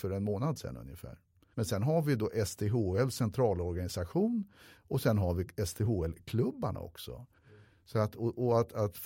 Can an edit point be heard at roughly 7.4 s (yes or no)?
yes